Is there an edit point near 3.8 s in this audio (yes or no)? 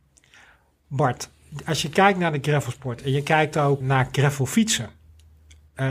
yes